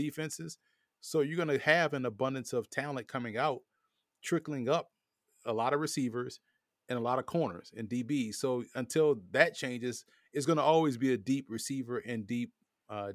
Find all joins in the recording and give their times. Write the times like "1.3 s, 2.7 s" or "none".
none